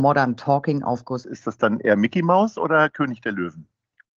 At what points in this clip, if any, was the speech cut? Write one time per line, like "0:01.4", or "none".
0:01.2